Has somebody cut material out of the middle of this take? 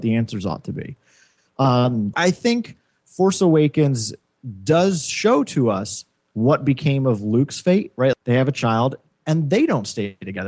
yes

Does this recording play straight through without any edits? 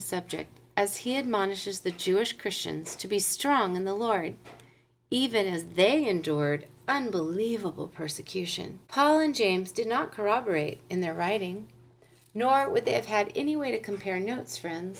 no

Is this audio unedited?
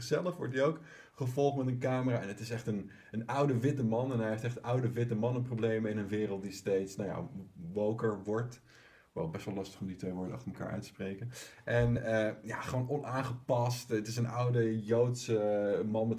yes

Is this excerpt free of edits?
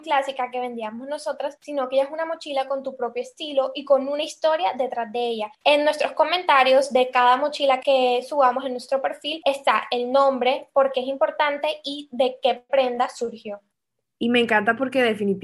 no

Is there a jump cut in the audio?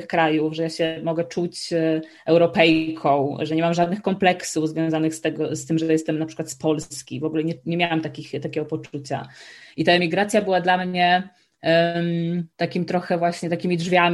yes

